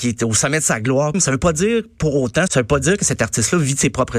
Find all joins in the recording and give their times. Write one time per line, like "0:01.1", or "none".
0:01.1
0:02.5